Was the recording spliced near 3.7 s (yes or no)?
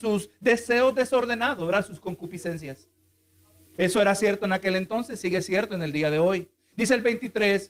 yes